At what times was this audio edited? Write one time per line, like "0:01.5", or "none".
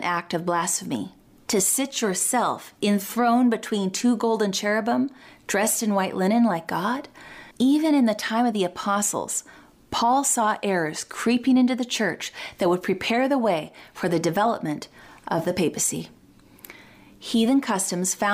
0:07.5

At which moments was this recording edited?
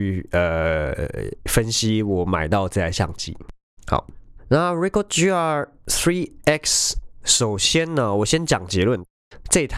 none

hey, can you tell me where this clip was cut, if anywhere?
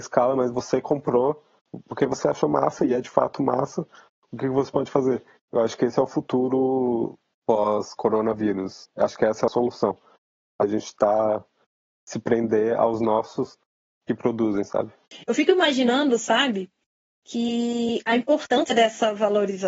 0:05.4

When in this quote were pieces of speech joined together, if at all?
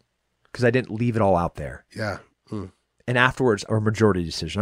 0:02.3
0:03.7

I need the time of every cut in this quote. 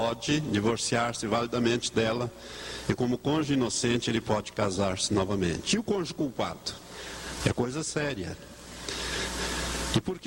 0:07.4

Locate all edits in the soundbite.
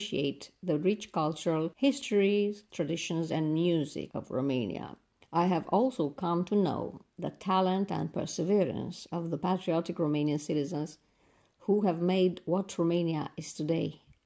0:02.7

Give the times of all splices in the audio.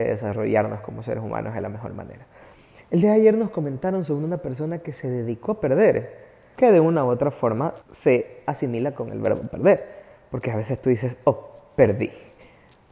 0:06.5
0:07.8

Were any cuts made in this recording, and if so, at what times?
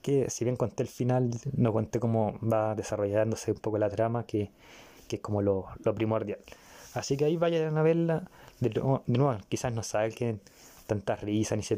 none

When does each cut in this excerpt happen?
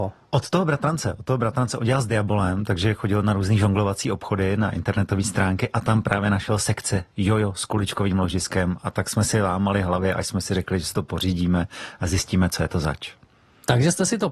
none

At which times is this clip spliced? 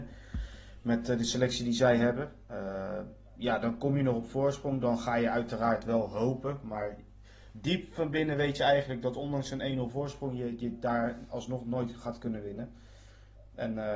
0:02.4

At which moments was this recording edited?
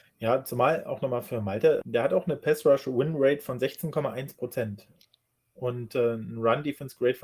0:01.8

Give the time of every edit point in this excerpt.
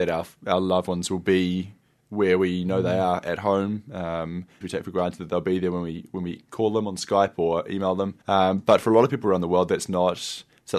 0:04.6
0:08.2

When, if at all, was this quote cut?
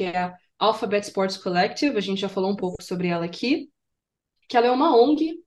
0:04.4

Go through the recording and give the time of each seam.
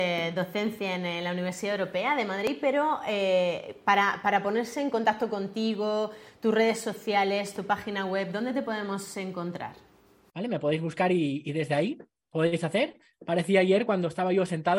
0:10.3
0:13.1

